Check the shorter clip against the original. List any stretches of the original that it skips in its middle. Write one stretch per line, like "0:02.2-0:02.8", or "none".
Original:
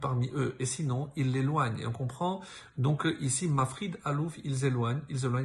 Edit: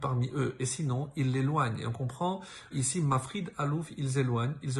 0:02.7-0:03.2